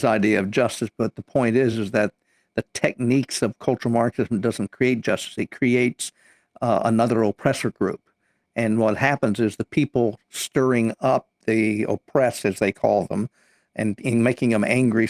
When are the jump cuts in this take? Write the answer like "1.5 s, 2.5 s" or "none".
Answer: none

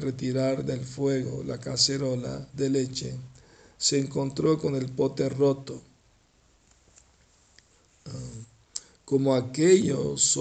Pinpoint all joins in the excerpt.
none

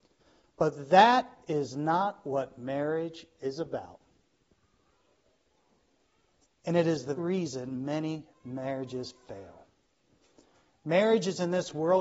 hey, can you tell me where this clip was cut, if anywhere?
7.2 s

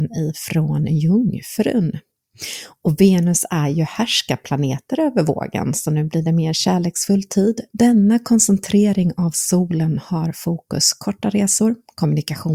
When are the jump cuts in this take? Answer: 7.7 s

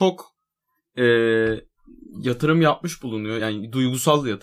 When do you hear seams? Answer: none

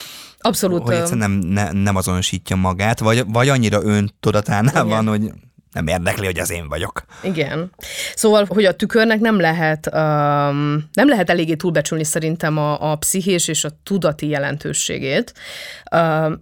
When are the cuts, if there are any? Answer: 8.5 s

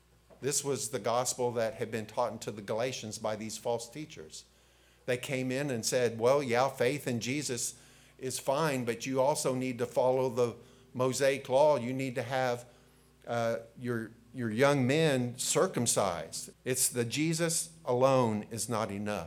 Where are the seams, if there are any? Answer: 16.5 s

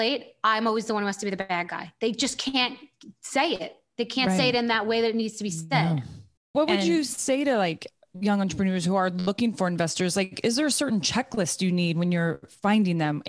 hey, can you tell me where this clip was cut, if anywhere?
none

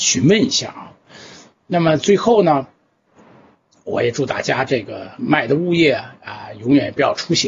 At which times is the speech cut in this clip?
none

